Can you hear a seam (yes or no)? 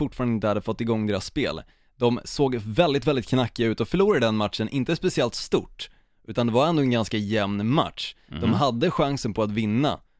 no